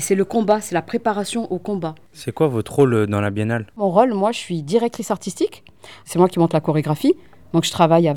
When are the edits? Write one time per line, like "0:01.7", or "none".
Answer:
0:06.0